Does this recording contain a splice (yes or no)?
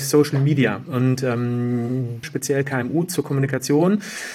yes